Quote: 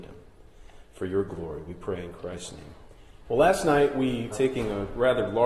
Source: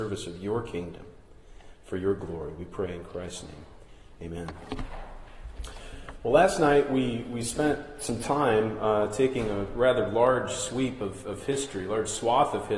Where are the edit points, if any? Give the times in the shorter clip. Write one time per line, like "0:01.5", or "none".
0:03.2
0:04.3

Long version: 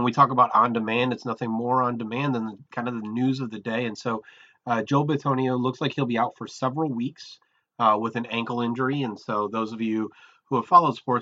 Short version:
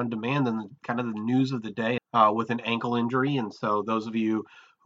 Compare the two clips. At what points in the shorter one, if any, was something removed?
0:02.0

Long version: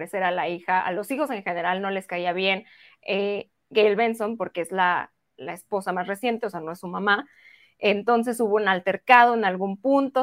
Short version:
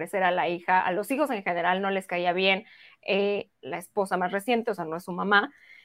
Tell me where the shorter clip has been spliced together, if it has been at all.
0:03.5

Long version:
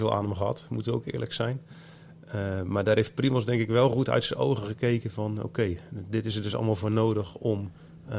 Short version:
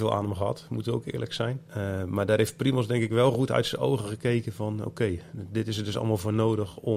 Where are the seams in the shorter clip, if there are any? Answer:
0:01.7

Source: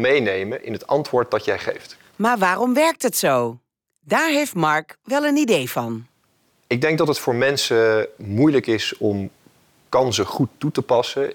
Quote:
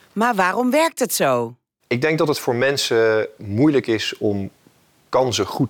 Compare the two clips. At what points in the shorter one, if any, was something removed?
0:01.8

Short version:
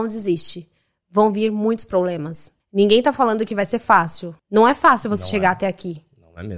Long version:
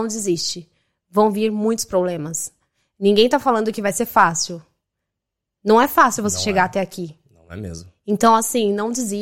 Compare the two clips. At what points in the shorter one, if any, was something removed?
0:02.6
0:04.4

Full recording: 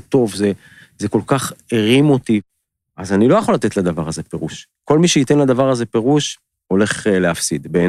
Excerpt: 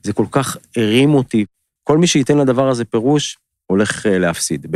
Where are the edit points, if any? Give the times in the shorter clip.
0:01.8

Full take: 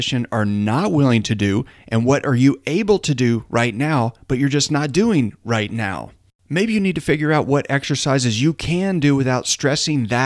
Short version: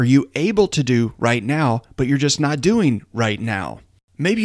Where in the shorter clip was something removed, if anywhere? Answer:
none

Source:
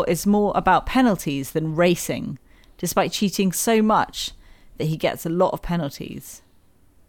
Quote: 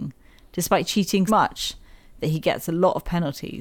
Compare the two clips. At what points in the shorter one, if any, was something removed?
0:01.3

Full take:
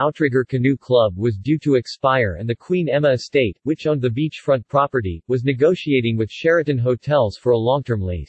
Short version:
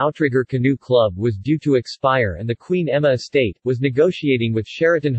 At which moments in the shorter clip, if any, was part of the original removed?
0:03.6

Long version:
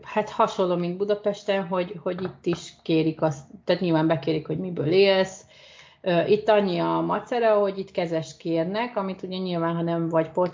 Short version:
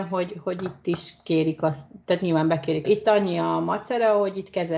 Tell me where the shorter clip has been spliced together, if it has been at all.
0:02.8

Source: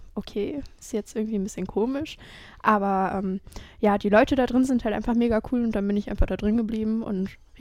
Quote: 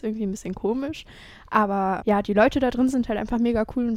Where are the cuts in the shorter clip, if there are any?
0:02.0

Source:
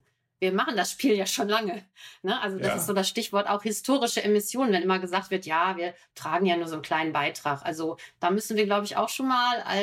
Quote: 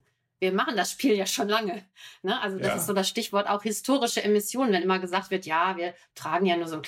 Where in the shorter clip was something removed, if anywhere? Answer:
none

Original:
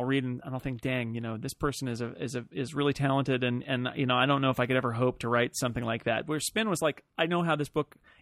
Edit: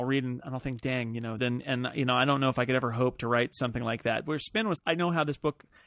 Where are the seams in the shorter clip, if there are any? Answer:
0:01.4
0:04.8

